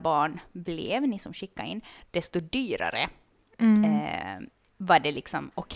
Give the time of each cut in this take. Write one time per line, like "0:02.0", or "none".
none